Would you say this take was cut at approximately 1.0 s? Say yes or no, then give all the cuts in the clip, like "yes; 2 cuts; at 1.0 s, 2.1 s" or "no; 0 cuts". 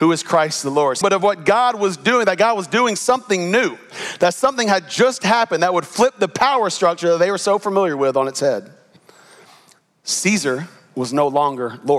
yes; 1 cut; at 1.0 s